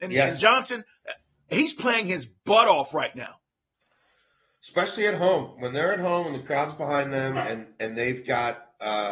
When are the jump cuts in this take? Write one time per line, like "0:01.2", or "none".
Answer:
none

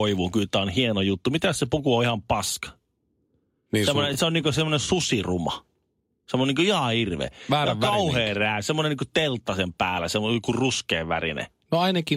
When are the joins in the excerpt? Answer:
none

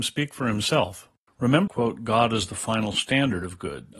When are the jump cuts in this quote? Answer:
0:01.7

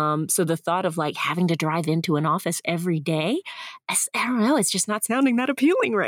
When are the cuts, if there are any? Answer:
none

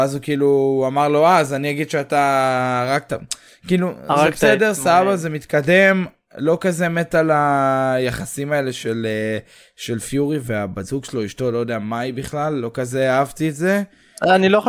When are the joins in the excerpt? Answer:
none

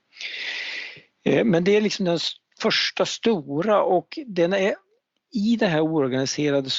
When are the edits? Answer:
none

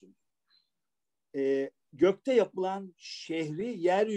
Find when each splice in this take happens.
none

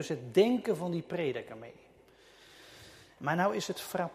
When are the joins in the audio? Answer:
0:03.2

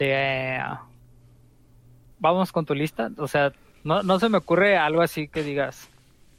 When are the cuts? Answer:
none

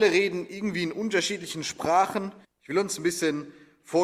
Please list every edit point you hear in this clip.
0:02.4

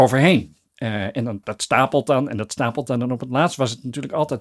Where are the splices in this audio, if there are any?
0:01.4

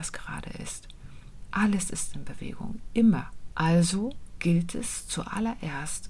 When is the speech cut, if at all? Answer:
0:03.5

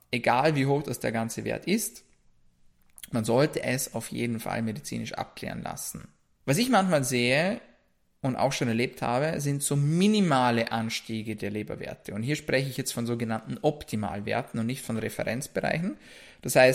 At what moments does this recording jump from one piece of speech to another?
0:06.4

